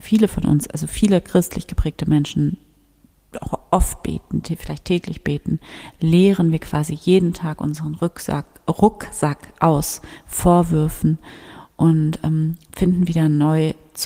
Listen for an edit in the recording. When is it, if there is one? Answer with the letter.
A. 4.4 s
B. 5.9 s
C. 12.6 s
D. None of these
D